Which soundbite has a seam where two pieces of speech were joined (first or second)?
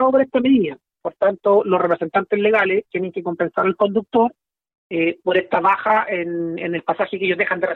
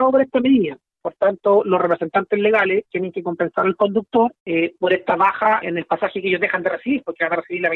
second